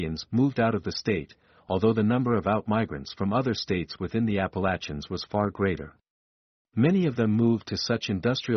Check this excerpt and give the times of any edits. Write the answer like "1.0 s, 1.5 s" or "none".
6.6 s

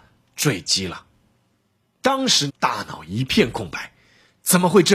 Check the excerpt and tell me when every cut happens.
2.5 s

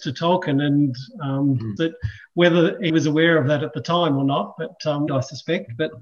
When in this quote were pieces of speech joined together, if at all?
1.8 s, 2.9 s, 5.1 s

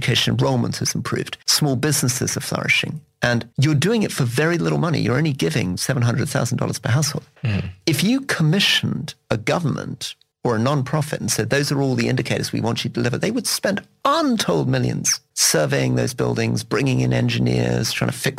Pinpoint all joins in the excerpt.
none

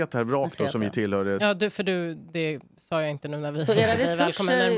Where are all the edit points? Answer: 1.4 s

